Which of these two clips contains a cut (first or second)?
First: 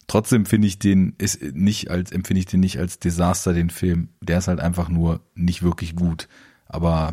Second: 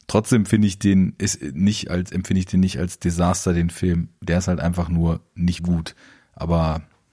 second